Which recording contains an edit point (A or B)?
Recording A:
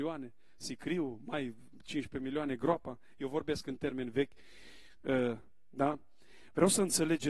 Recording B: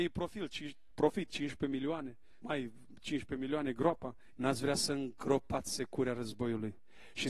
B